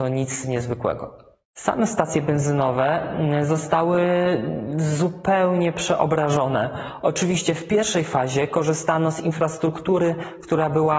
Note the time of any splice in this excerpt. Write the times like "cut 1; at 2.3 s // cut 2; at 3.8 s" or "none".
none